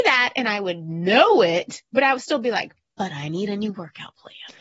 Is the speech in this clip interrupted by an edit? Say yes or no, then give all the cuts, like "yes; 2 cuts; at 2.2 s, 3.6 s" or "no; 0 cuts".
no; 0 cuts